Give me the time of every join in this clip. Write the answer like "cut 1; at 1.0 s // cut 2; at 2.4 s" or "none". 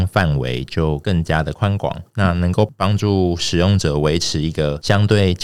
cut 1; at 2.1 s